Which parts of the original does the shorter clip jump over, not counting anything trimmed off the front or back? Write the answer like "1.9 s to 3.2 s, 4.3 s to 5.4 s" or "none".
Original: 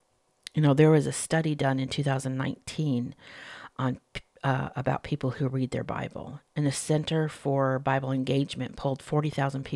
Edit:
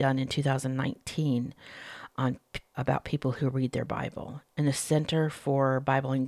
4.4 s to 4.7 s